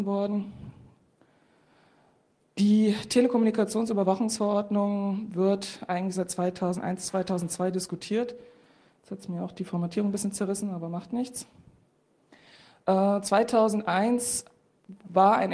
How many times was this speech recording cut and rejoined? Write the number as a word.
zero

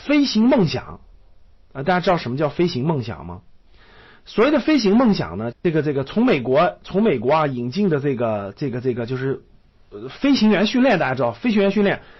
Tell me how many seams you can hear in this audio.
one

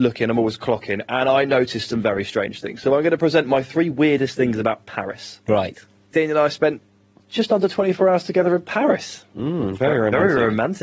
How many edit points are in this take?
one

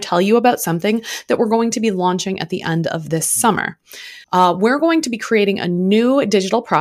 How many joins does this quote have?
one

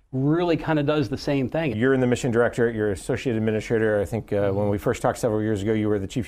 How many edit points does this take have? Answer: one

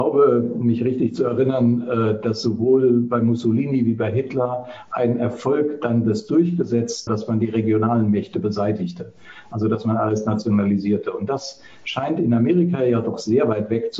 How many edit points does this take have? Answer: one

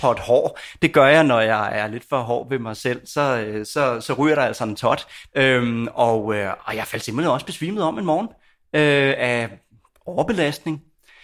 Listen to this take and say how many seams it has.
one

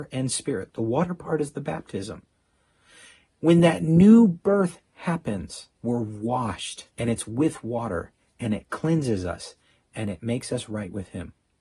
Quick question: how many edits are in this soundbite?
two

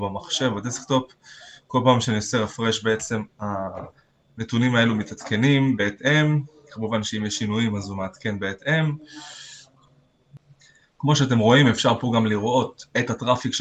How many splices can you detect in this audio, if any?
zero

